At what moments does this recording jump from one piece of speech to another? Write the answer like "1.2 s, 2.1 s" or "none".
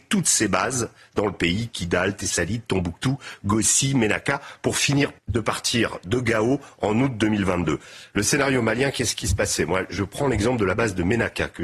5.2 s, 8.1 s